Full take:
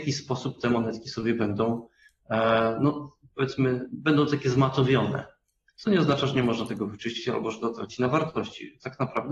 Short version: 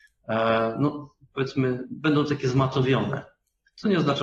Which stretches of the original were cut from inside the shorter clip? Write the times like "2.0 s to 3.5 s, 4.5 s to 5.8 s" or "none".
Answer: none